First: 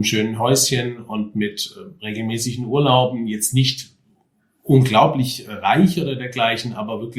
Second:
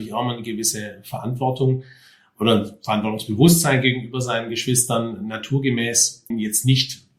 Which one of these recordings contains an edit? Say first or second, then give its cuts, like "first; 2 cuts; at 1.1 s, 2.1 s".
second; 1 cut; at 6.3 s